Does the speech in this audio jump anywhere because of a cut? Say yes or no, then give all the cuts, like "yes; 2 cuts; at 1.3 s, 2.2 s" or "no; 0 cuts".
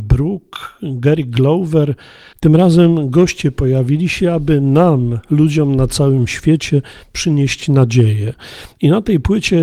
yes; 1 cut; at 2.3 s